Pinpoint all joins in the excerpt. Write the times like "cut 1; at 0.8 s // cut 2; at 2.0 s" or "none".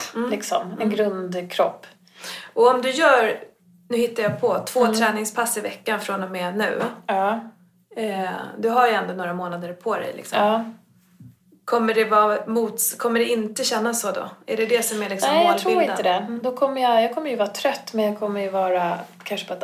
none